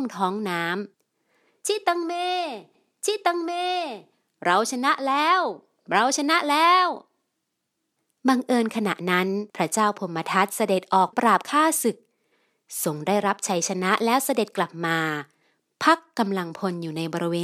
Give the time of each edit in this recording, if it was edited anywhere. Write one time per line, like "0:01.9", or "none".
0:00.9
0:09.5
0:11.1